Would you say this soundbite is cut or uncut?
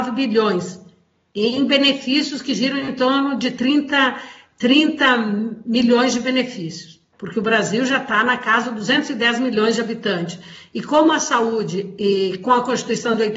cut